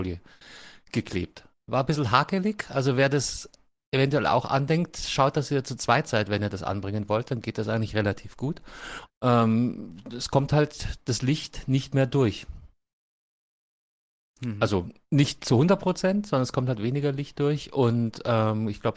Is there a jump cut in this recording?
yes; 1 cut; at 9.1 s

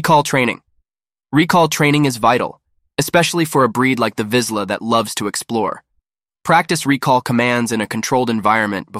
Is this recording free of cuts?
yes; 0 cuts

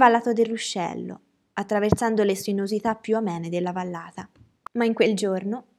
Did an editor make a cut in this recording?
no; 0 cuts

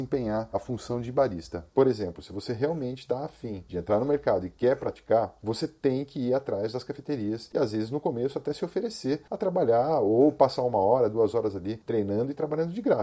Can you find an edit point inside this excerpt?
yes; 1 cut; at 1.7 s

